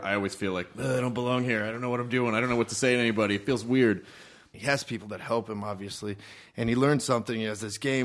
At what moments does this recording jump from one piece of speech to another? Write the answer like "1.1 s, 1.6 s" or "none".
4.5 s

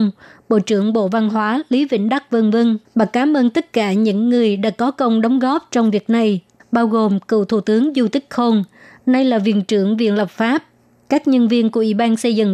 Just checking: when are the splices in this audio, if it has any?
2.9 s

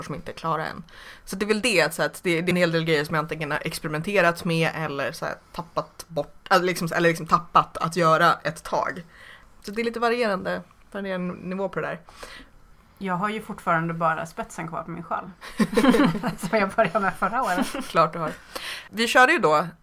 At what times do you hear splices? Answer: 2.5 s

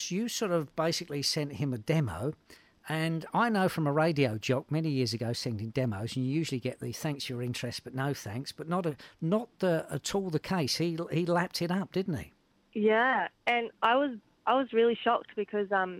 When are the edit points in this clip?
none

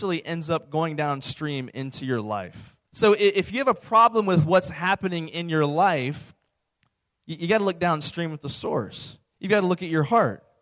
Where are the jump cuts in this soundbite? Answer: 2.8 s, 9.3 s

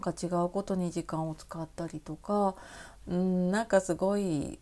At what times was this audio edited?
3.0 s

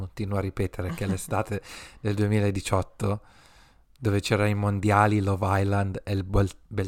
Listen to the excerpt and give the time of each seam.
none

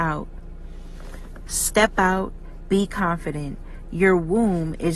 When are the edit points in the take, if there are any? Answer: 1.4 s, 2.6 s

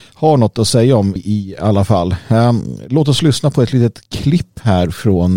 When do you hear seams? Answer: 1.2 s

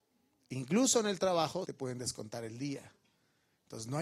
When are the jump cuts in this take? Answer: 1.6 s

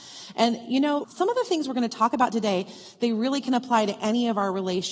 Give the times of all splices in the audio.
1.0 s

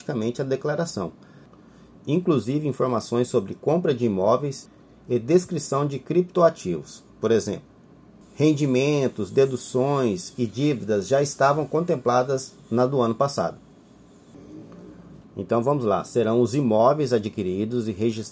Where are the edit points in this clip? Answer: 15.2 s

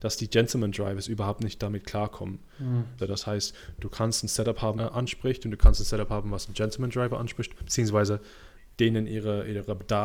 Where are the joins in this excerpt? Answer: 3.0 s, 4.8 s

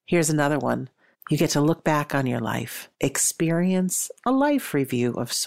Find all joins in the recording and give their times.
1.1 s, 2.9 s

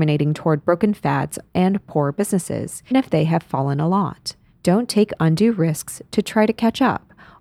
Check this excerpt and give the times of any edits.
2.9 s, 4.5 s

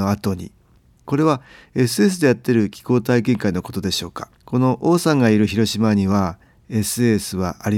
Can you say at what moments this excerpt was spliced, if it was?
1.0 s, 4.4 s

